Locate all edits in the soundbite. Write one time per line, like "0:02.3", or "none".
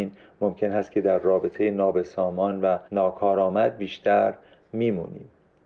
0:02.9